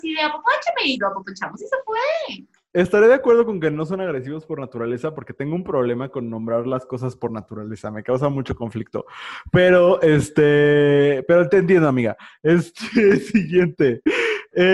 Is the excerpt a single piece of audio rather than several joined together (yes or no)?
yes